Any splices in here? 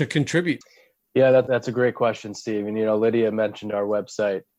no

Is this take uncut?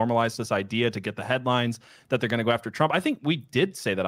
yes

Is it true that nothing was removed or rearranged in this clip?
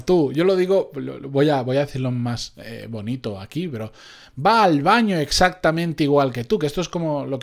yes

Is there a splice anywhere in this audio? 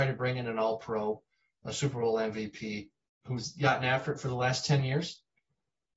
yes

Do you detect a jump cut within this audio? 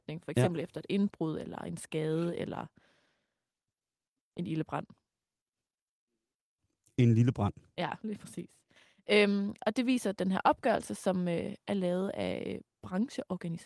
no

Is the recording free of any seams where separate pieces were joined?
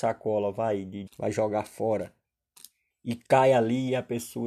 no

